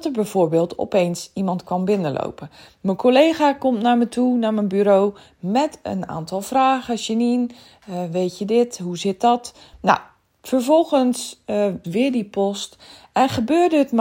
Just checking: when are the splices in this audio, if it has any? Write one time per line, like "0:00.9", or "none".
0:09.7
0:11.8